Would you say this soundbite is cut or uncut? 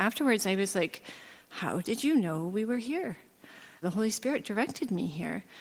cut